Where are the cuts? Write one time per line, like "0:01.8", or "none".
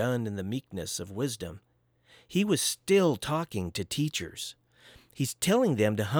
none